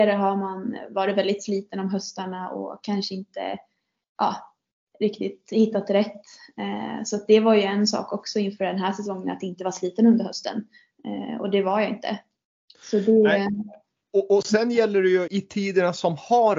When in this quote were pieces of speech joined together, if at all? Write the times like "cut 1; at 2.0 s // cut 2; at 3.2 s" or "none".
cut 1; at 15.3 s